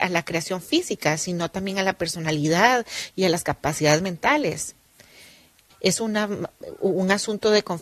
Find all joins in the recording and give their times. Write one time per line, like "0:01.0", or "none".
0:05.7

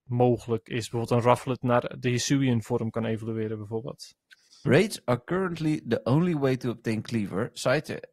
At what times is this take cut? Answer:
0:04.7

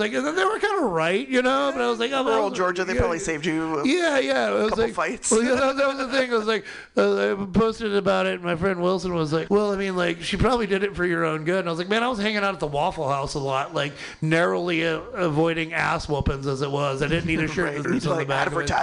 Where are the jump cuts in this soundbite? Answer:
0:09.5
0:17.8

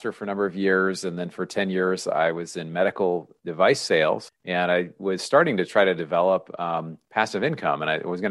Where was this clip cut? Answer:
0:04.3

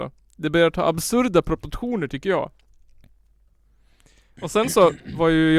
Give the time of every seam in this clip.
none

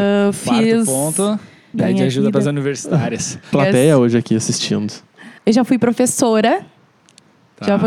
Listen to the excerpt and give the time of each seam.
0:01.7
0:03.5
0:05.4

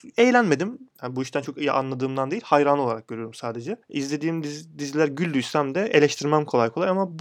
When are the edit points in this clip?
0:00.9
0:03.8

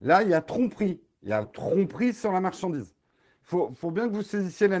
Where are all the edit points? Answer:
0:01.4

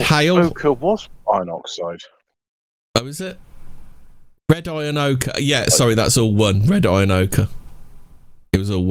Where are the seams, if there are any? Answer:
none

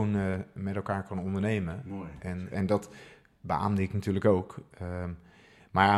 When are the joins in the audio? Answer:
0:02.5

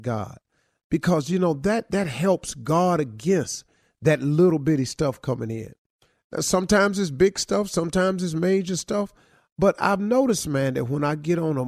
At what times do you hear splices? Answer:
none

